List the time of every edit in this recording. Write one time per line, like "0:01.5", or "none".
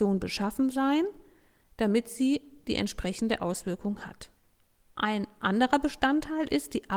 0:04.8